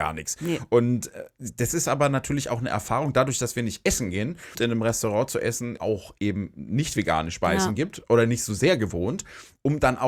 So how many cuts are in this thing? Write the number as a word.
two